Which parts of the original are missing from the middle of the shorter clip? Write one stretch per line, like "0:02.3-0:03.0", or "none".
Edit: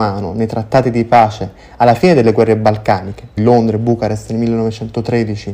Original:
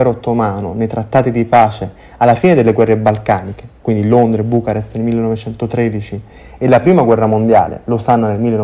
0:03.8-0:04.0